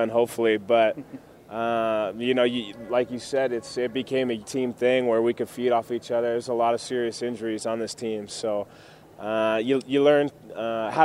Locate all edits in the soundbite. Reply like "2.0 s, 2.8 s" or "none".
4.4 s